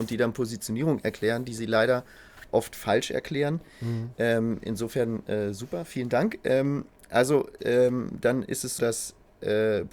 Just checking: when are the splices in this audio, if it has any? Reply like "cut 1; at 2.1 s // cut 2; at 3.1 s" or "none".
cut 1; at 7.6 s // cut 2; at 8.8 s